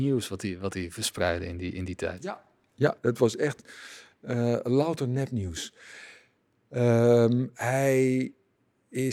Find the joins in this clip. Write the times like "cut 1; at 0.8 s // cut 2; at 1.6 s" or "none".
none